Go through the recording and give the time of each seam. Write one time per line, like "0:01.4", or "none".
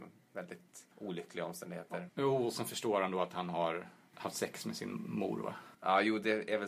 0:00.9
0:02.1